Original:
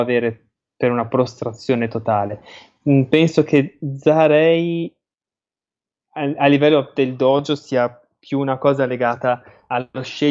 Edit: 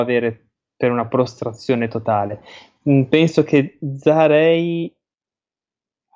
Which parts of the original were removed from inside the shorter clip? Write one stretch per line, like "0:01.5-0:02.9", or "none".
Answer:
none